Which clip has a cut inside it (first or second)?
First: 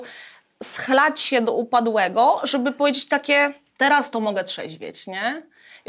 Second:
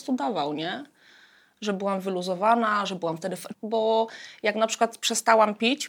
second